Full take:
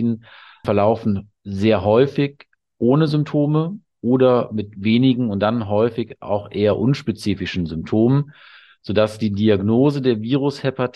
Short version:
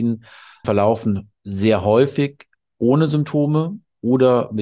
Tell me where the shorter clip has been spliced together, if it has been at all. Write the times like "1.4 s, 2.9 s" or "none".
none